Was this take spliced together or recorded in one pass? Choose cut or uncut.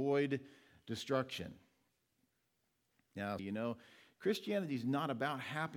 cut